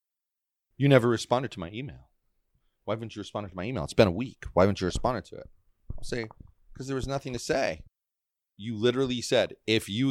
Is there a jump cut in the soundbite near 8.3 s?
no; 0 cuts

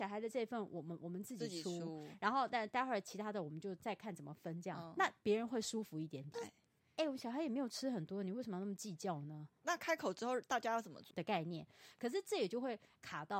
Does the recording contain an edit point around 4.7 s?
no; 3 cuts; at 6.3 s, 9.5 s, 11.1 s

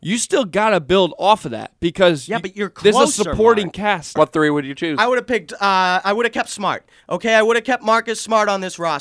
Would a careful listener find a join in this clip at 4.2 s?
yes; 1 cut; at 4.2 s

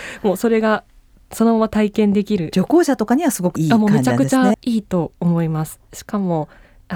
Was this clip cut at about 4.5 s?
yes; 1 cut; at 4.5 s

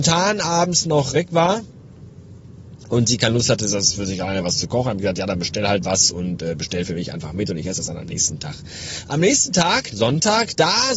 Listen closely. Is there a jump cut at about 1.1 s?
yes; 2 cuts; at 1.1 s, 9.9 s

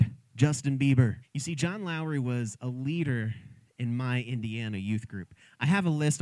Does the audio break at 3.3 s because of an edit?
no; 1 cut; at 1.2 s

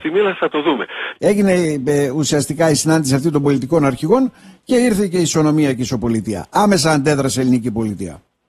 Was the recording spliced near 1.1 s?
yes; 1 cut; at 1.1 s

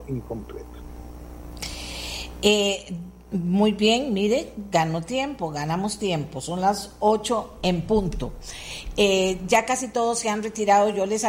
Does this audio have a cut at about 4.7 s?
no; 0 cuts

